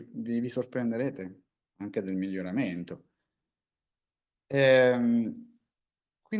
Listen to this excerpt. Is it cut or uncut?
uncut